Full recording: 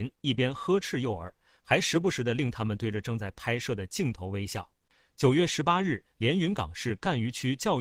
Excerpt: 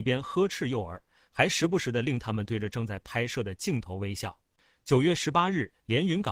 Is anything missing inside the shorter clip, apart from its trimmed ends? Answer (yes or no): no